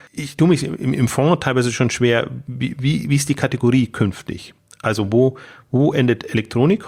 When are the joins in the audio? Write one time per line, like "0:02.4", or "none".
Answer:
none